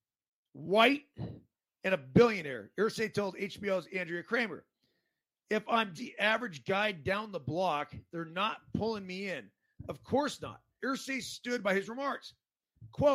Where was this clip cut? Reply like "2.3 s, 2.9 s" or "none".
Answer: 5.9 s, 10.8 s